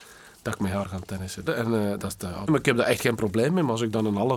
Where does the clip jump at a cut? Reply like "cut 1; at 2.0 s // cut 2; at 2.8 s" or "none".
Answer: cut 1; at 1.5 s // cut 2; at 2.5 s

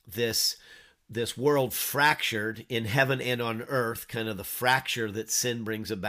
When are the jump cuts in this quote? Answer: none

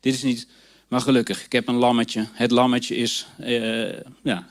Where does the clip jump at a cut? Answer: none

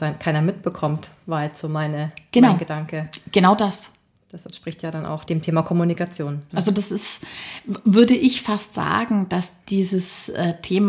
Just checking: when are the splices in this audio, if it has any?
cut 1; at 5.3 s // cut 2; at 6.5 s

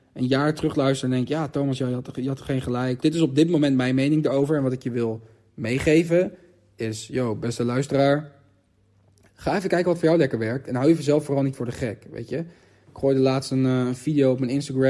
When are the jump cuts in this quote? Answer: cut 1; at 3.0 s

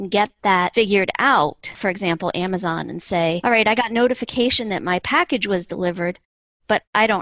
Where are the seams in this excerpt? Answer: cut 1; at 1.7 s

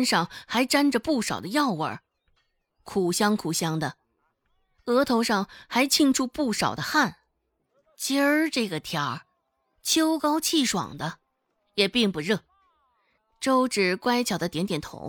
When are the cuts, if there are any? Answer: cut 1; at 13.2 s

